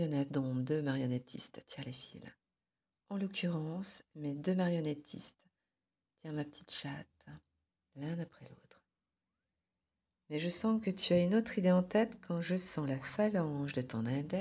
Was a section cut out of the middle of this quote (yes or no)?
no